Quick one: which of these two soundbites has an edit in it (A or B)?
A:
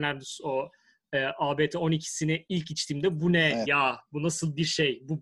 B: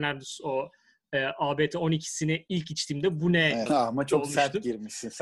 B